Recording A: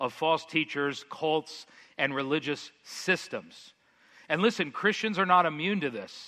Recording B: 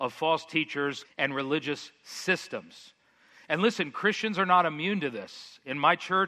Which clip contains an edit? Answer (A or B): B